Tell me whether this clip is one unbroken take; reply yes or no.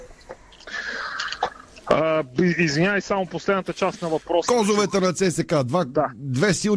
yes